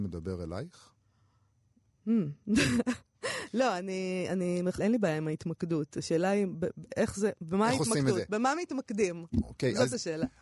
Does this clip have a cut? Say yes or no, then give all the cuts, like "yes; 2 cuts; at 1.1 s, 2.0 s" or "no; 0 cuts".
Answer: yes; 1 cut; at 4.8 s